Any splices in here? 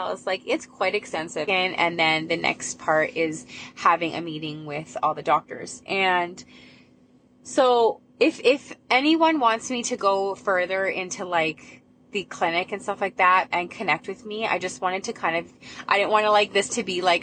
yes; 2 cuts; at 1.5 s, 13.5 s

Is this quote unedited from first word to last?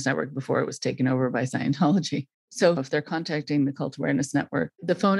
no; 1 cut; at 2.8 s

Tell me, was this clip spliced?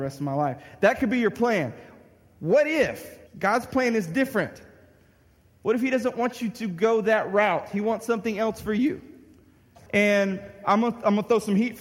yes; 2 cuts; at 3.3 s, 9.9 s

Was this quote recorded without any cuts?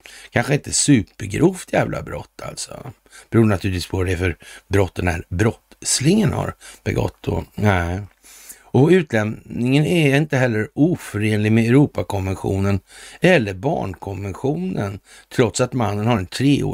yes; 0 cuts

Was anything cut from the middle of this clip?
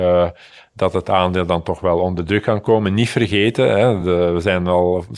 no; 0 cuts

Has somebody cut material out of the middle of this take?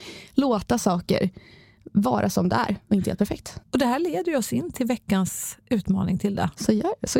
yes; 1 cut; at 3.6 s

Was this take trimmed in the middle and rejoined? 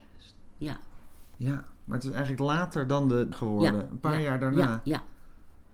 yes; 1 cut; at 3.3 s

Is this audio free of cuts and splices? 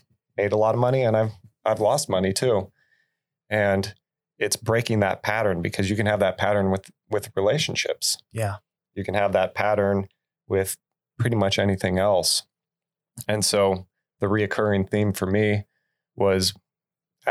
yes; 0 cuts

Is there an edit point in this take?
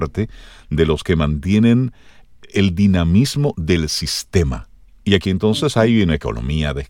no; 0 cuts

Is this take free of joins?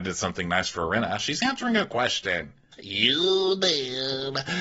no; 1 cut; at 2.7 s

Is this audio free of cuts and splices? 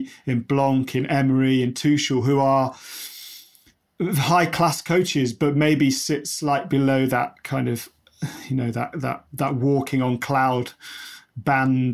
yes; 0 cuts

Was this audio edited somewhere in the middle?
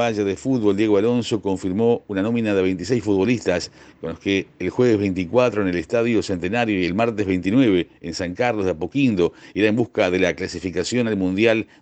no; 0 cuts

